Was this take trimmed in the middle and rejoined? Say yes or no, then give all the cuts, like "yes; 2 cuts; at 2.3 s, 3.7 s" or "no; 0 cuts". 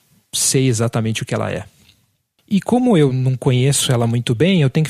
no; 0 cuts